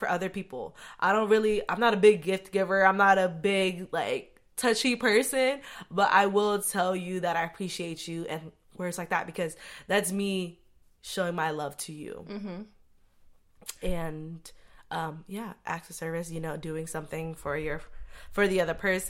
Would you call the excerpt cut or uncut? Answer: uncut